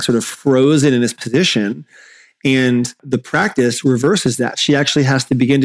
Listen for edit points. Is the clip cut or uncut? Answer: uncut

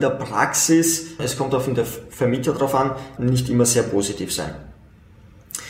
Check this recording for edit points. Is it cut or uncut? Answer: cut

